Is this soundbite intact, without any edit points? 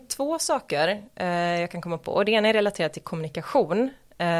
yes; 0 cuts

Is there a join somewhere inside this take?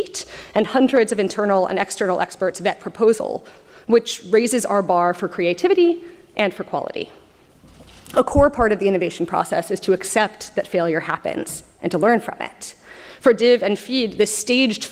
no; 0 cuts

